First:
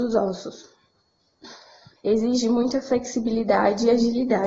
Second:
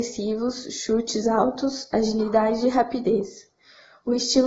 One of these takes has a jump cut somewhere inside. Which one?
first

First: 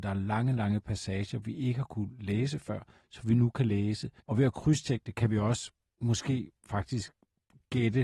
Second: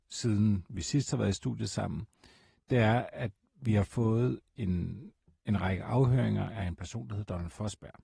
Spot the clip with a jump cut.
first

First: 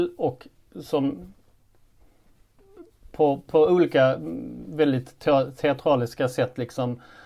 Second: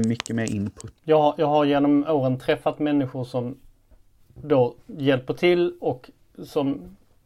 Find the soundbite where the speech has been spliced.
second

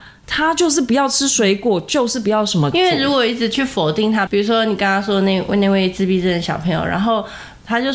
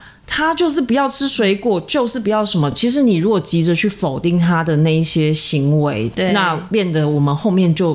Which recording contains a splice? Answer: first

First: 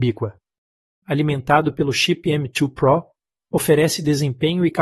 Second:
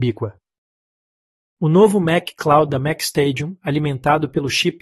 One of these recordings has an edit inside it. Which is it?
first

